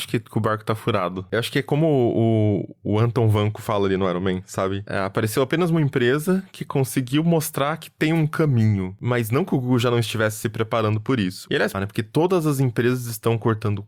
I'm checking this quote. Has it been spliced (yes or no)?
yes